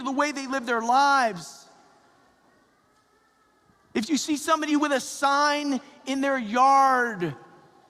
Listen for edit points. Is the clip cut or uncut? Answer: cut